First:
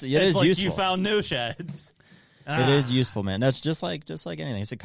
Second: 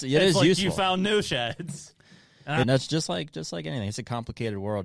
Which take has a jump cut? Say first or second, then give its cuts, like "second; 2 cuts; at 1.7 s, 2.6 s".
second; 1 cut; at 2.6 s